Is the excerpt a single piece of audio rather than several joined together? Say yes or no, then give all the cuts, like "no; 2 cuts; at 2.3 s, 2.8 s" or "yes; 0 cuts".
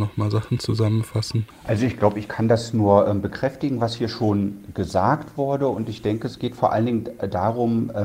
yes; 0 cuts